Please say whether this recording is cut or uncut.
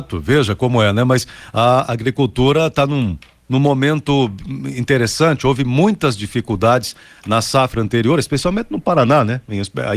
uncut